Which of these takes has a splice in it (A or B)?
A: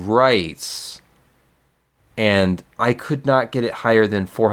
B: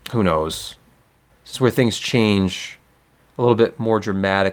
B